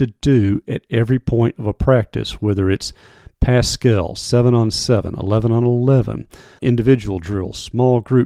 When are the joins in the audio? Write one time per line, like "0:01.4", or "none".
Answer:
0:06.6